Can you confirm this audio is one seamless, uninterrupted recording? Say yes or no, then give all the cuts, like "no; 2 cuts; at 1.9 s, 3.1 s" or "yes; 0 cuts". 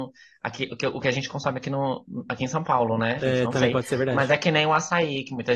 no; 1 cut; at 3.2 s